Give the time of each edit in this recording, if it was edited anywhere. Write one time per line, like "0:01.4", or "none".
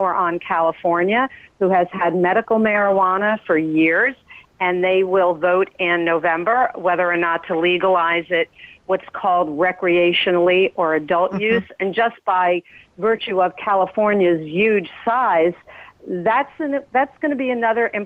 none